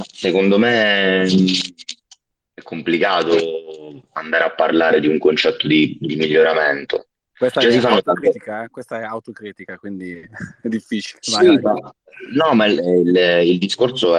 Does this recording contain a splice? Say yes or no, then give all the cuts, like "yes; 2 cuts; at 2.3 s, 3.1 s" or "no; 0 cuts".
no; 0 cuts